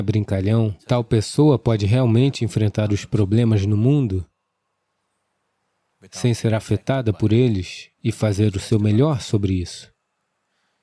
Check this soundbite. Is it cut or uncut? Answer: cut